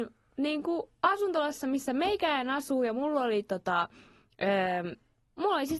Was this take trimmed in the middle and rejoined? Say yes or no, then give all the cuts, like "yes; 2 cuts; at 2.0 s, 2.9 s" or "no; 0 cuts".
no; 0 cuts